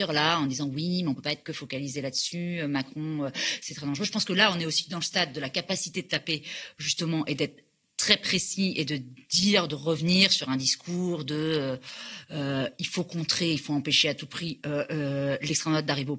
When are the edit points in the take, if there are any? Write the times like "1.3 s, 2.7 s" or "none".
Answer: none